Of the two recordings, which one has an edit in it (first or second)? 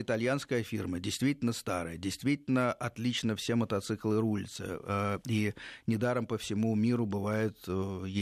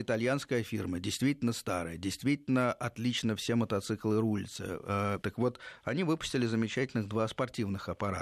second